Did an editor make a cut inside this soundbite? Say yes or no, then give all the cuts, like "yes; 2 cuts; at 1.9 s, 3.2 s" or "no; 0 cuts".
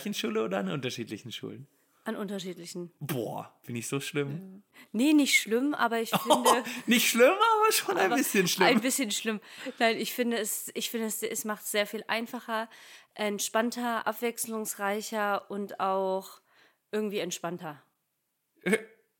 no; 0 cuts